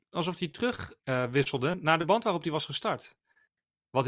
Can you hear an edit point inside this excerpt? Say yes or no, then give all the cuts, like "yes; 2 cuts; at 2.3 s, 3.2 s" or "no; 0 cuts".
yes; 1 cut; at 1.0 s